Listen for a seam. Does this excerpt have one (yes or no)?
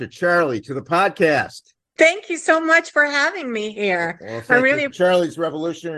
yes